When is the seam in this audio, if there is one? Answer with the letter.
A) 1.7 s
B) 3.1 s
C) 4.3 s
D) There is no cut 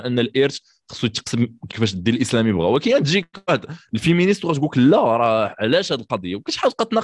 A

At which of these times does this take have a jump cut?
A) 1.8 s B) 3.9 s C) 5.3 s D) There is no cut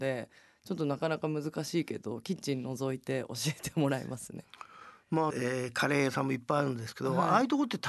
C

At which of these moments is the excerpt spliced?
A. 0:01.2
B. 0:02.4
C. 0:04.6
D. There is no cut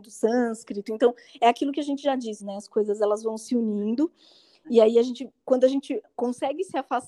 B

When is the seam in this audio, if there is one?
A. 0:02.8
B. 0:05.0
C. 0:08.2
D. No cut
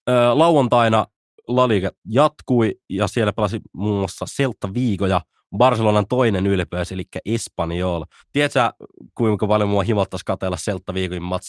C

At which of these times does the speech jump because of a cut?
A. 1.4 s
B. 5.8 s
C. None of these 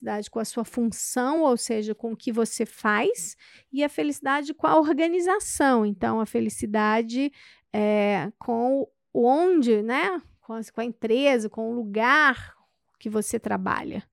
C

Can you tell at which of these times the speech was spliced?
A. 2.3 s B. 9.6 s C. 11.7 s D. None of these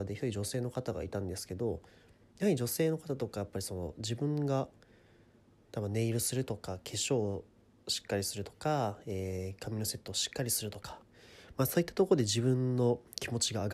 D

